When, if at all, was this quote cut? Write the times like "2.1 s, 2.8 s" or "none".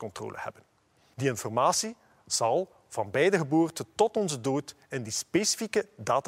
1.1 s